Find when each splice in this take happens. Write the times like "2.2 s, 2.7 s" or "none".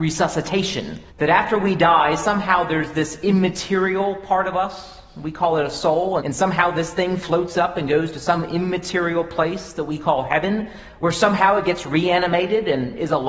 1.1 s, 6.2 s